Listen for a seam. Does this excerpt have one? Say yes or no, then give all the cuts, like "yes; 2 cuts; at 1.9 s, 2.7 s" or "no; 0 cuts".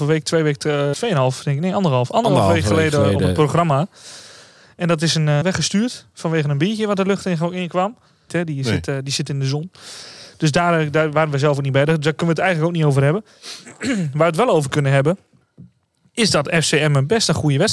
yes; 3 cuts; at 0.9 s, 5.4 s, 8.3 s